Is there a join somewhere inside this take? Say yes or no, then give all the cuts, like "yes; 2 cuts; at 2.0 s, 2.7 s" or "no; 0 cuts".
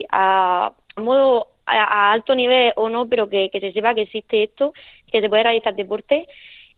yes; 1 cut; at 1.0 s